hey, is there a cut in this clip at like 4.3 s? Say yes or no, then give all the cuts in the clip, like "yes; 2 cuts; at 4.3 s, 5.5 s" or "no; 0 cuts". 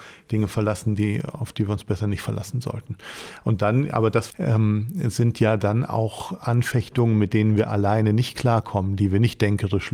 yes; 1 cut; at 4.3 s